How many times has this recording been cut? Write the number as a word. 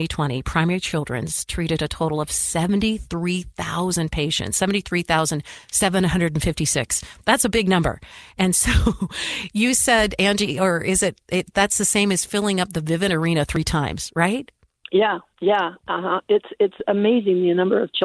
zero